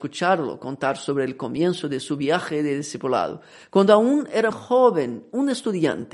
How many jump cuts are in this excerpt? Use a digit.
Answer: 1